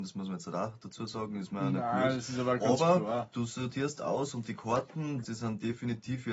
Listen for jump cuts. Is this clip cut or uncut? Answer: cut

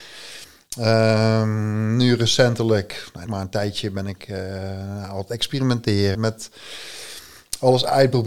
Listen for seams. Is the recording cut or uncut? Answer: cut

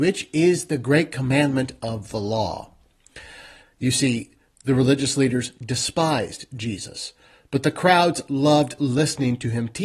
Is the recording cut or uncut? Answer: cut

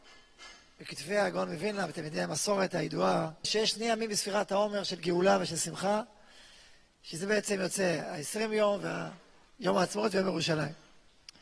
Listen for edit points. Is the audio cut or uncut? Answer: cut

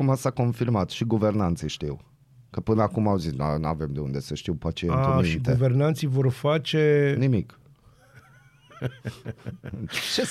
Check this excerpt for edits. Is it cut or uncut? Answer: uncut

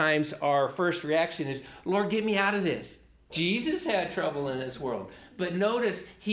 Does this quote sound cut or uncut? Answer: cut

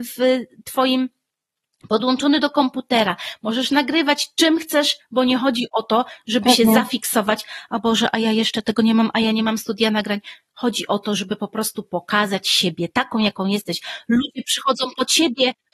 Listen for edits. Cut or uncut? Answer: cut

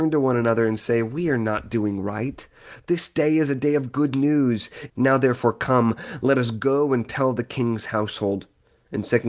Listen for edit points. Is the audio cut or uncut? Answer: cut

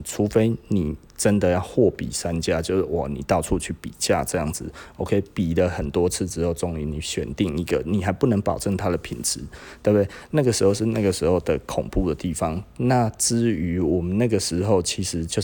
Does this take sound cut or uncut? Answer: uncut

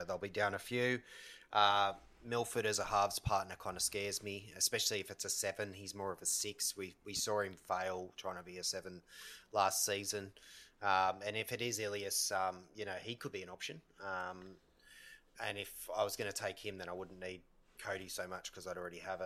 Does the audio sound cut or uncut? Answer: uncut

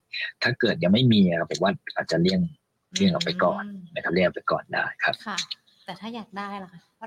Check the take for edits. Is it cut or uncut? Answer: uncut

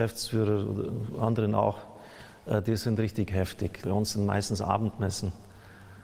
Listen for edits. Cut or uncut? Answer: cut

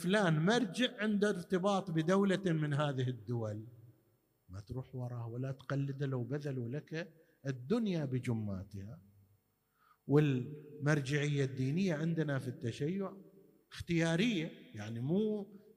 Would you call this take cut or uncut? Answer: uncut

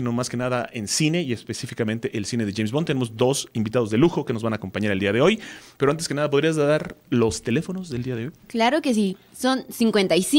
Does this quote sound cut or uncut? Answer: uncut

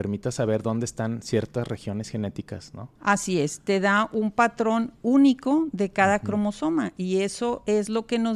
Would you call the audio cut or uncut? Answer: cut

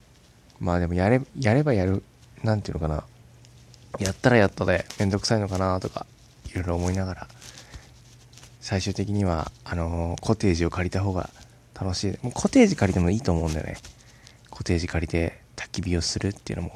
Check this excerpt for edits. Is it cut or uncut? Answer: uncut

